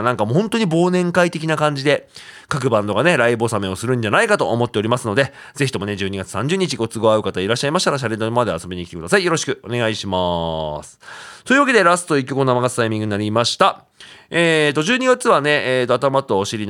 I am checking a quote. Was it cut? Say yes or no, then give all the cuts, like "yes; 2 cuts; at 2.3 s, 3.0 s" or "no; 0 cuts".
no; 0 cuts